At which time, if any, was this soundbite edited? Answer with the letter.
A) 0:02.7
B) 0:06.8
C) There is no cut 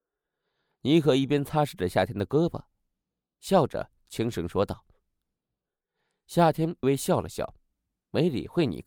B